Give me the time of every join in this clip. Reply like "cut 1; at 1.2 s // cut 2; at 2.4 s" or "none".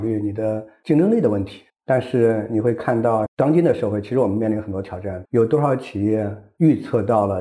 cut 1; at 1.7 s // cut 2; at 5.2 s